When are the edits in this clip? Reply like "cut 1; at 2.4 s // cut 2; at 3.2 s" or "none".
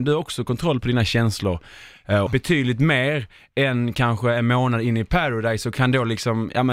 cut 1; at 2.3 s